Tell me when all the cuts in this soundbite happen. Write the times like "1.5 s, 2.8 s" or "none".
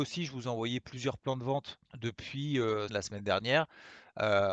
1.9 s, 2.9 s